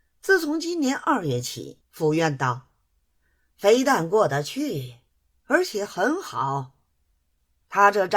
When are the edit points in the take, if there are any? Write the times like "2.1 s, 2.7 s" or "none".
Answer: 1.8 s